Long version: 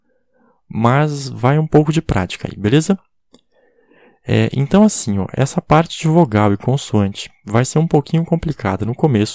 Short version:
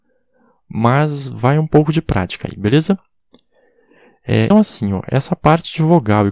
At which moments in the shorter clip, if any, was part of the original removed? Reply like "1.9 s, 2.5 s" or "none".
4.5 s